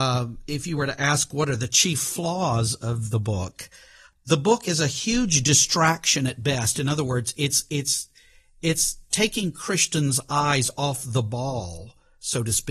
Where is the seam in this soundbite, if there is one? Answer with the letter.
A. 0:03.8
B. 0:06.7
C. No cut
C